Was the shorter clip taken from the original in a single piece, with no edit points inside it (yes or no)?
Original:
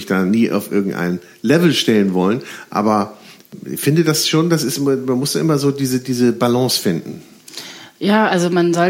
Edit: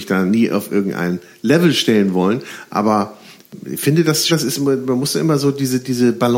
no